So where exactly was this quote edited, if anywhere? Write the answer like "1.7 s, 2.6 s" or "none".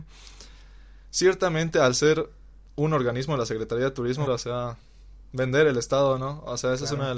4.3 s